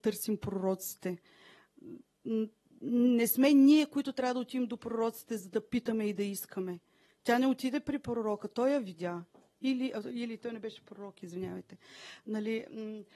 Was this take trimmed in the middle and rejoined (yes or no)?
no